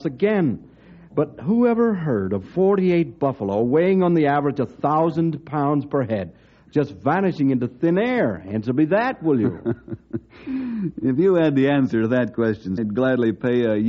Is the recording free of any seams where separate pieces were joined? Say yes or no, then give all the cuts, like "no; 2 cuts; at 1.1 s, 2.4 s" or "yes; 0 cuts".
no; 1 cut; at 12.8 s